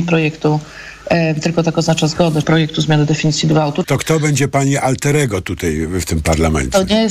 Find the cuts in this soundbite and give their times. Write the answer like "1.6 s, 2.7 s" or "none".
2.4 s, 3.8 s, 6.0 s